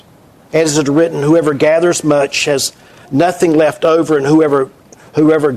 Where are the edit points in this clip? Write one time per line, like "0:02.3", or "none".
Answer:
none